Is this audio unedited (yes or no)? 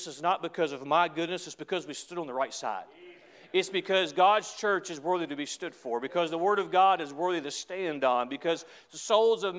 yes